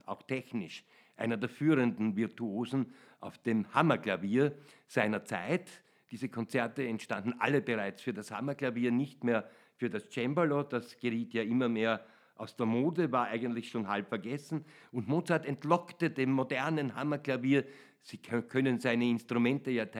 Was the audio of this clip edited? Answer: no; 0 cuts

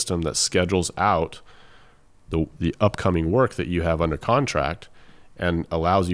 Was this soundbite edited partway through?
no; 0 cuts

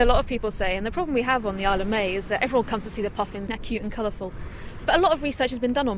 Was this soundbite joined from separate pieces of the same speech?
yes; 1 cut; at 3.5 s

